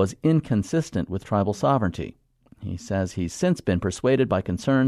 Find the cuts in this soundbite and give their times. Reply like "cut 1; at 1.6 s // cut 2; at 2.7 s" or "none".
none